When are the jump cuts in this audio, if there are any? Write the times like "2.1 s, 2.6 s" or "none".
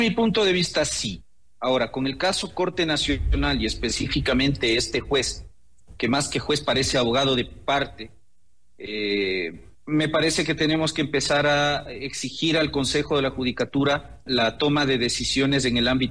9.7 s, 14.3 s

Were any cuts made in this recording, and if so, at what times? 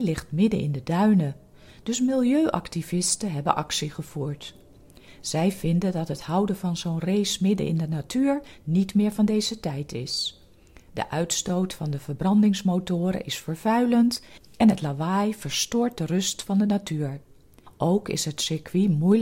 none

